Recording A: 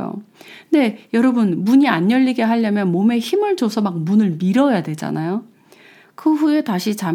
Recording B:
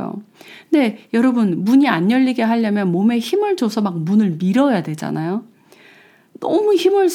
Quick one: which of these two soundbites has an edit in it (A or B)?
A